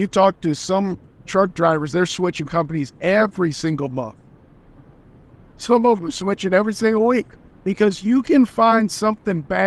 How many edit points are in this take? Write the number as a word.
one